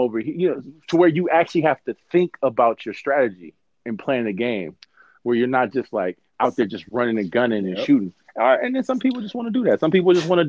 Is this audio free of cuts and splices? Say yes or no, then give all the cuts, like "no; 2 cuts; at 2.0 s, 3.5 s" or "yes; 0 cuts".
yes; 0 cuts